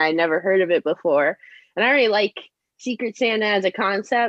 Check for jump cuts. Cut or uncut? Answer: uncut